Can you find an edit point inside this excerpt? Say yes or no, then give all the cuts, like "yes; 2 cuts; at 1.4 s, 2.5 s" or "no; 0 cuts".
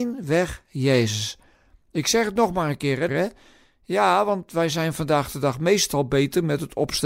yes; 1 cut; at 3.1 s